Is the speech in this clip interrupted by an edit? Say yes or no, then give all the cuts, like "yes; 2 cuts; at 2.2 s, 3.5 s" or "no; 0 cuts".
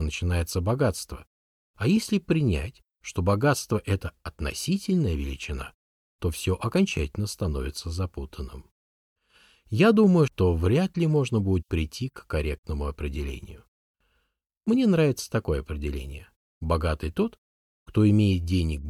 yes; 1 cut; at 10.3 s